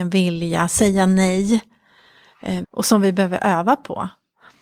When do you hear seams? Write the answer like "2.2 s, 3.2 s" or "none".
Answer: 2.6 s